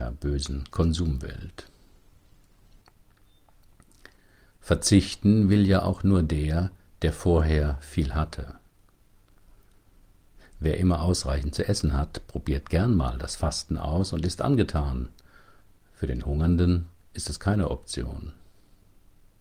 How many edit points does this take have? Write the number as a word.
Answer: zero